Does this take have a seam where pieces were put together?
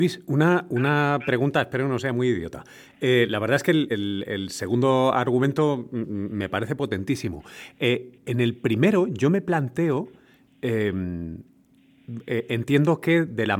no; 0 cuts

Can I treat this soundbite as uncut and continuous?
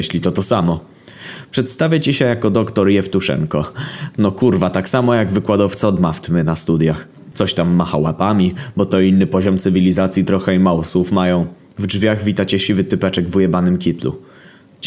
no; 2 cuts; at 7.3 s, 11.7 s

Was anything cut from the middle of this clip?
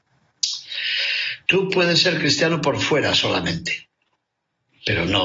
yes; 1 cut; at 1.5 s

